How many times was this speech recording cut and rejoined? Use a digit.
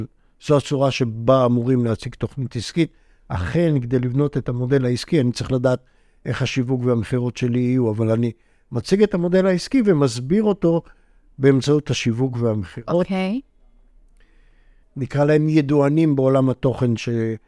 1